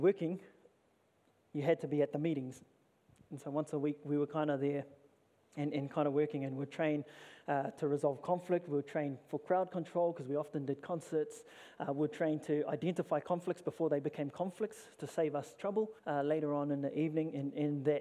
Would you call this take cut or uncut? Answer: cut